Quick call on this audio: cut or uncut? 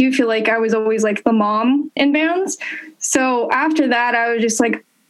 cut